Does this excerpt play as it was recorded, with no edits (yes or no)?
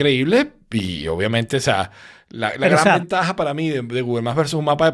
yes